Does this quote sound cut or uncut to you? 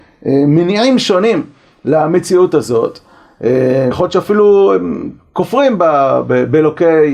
cut